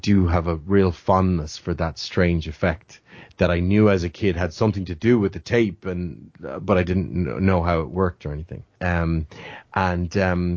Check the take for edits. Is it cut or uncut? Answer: cut